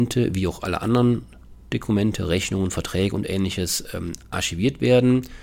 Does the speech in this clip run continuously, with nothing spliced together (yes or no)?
yes